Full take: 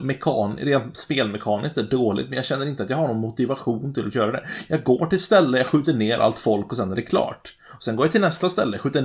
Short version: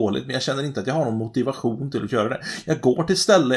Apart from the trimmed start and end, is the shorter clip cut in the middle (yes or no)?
no